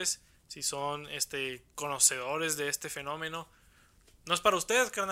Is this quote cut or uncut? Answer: uncut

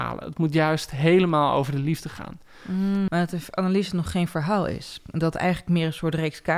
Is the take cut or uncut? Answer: cut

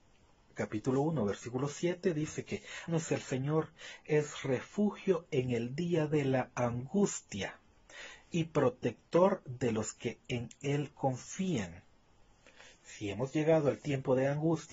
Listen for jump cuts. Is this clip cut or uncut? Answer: cut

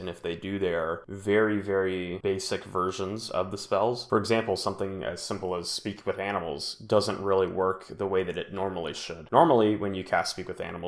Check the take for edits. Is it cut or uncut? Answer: uncut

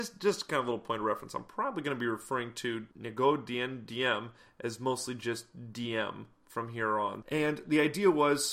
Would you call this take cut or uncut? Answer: cut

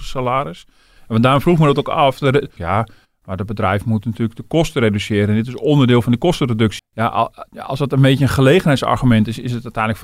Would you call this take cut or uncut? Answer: cut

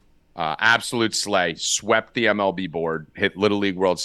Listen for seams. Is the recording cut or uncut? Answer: uncut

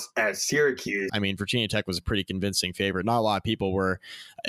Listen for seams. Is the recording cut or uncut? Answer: cut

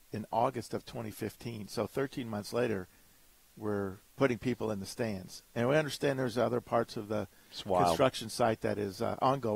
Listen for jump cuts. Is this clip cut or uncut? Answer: cut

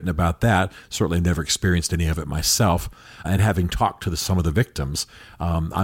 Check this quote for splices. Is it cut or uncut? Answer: cut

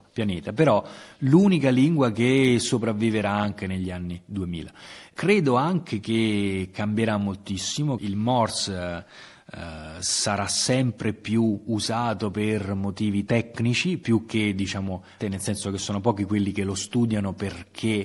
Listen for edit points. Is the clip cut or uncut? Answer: cut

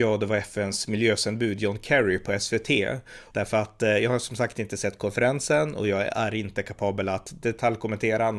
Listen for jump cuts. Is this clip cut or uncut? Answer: cut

